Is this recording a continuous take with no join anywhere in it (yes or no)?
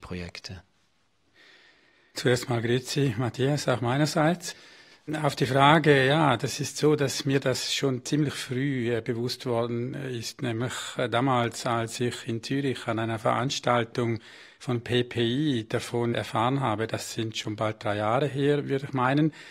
yes